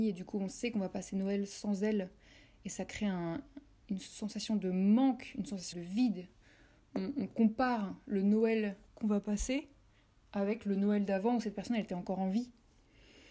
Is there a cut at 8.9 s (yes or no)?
yes